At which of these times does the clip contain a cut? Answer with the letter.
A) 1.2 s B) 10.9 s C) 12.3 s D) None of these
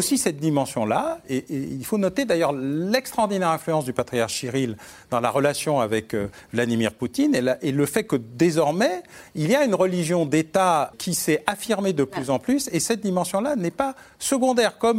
B